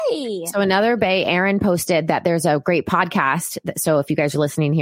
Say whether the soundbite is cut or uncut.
uncut